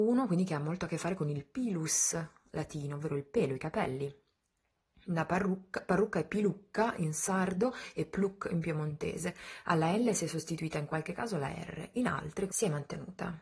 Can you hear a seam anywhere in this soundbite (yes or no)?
yes